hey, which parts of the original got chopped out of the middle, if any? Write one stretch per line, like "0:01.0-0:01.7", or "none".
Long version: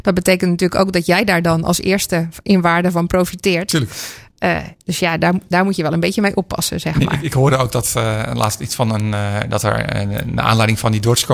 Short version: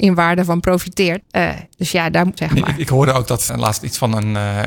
0:03.7-0:04.3
0:05.4-0:06.8
0:07.9-0:08.3